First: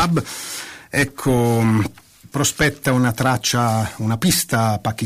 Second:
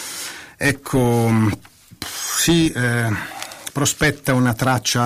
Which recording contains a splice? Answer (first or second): first